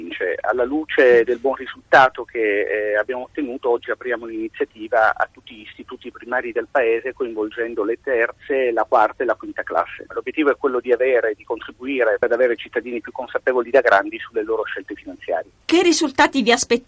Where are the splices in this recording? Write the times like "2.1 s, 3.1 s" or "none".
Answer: 10.1 s